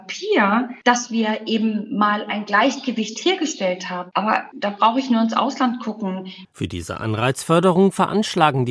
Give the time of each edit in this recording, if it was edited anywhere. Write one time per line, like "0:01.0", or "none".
0:04.1
0:06.4

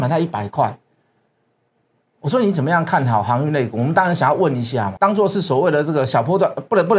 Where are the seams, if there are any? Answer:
0:05.0

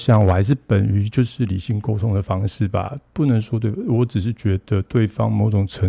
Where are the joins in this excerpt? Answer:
none

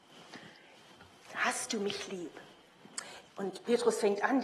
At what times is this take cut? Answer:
0:03.3

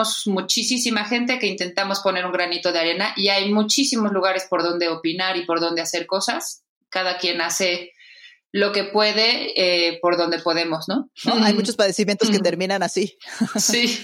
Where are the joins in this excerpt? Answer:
0:11.1

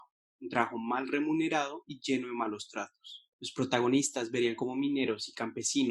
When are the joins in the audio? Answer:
0:03.3

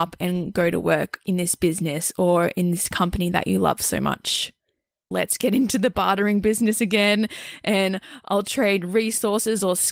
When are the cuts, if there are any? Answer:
0:05.1

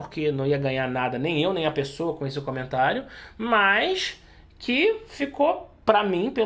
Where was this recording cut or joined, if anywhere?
none

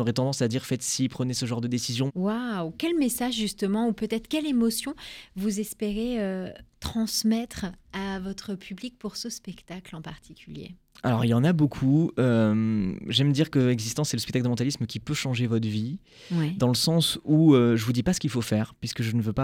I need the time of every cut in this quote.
0:02.1

